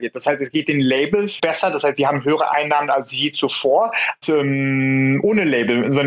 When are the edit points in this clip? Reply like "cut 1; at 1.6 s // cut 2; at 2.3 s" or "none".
cut 1; at 1.4 s // cut 2; at 4.2 s